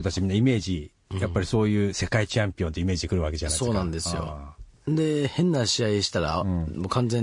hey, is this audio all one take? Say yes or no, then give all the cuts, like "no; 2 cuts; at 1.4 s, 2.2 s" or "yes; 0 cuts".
yes; 0 cuts